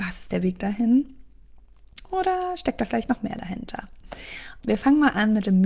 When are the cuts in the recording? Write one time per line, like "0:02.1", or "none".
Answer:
0:02.0
0:04.6